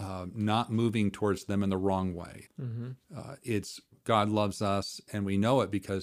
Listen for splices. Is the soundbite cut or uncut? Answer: cut